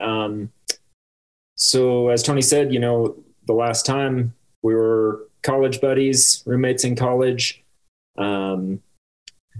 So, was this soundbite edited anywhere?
no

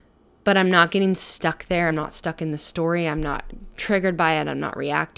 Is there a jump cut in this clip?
no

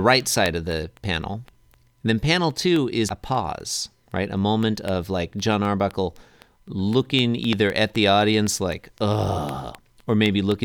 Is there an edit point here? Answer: yes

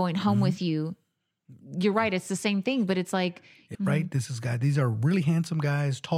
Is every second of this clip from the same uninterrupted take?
no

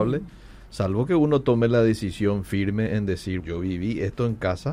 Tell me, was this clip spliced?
yes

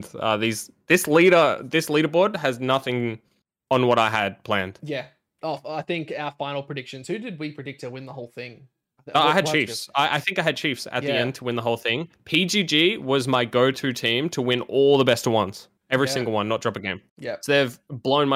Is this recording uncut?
no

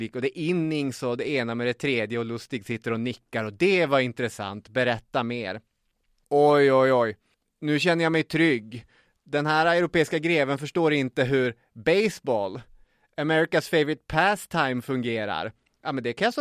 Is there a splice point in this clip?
yes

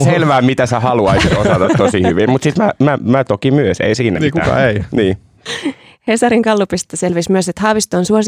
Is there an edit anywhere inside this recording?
no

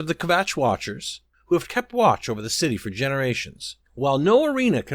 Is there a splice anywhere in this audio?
yes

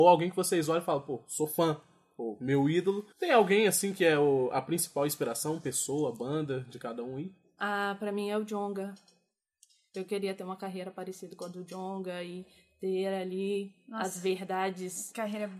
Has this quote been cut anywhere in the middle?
yes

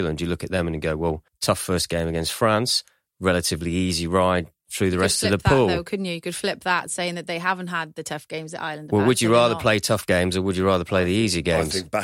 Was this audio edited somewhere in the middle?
no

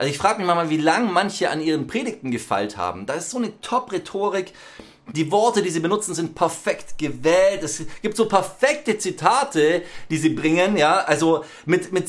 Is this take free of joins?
yes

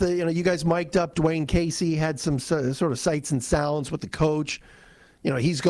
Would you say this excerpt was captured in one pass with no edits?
yes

